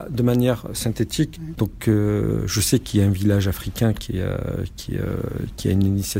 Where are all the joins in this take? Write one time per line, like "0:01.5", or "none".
0:01.6